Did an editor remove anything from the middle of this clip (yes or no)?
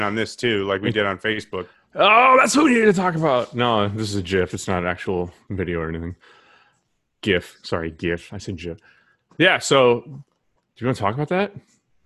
no